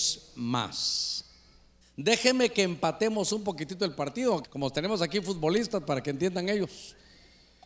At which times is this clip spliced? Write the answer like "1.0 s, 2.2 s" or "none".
1.8 s, 4.4 s